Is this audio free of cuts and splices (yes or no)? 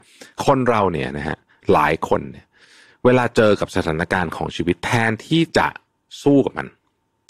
yes